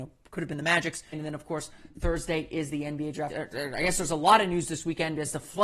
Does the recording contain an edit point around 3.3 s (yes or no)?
yes